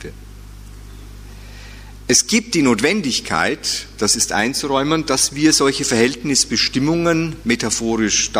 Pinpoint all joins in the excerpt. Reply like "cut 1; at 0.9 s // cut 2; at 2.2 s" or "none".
none